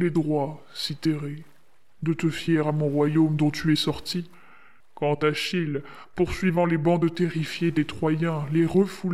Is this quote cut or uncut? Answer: cut